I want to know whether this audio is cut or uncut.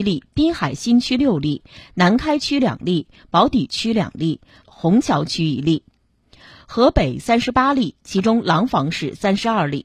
cut